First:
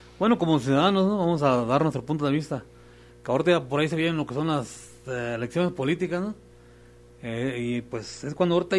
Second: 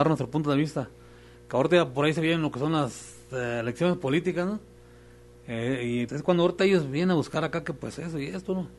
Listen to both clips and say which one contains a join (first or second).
second